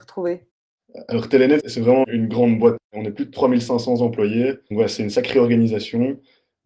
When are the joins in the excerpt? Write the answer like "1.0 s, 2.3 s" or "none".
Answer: 4.7 s